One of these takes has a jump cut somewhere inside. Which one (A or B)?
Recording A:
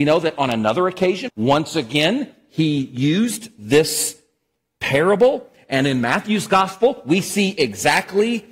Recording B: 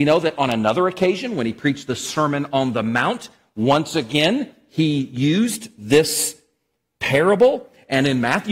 A